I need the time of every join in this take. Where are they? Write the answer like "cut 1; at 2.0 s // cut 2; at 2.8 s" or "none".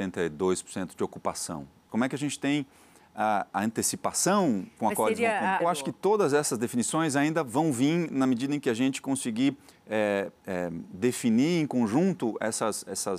cut 1; at 1.9 s // cut 2; at 5.6 s